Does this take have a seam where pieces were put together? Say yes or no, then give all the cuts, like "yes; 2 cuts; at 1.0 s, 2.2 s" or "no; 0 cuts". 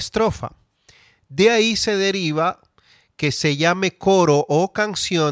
no; 0 cuts